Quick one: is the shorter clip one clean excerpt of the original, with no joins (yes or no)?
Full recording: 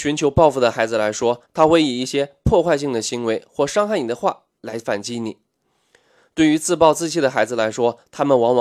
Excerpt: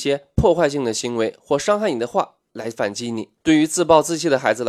no